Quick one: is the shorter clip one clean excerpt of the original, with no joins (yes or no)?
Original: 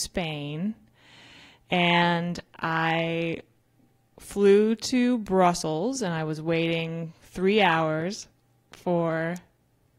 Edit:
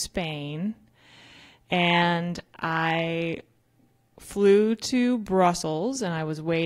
yes